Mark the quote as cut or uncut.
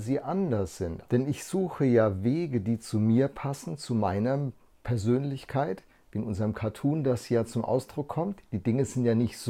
cut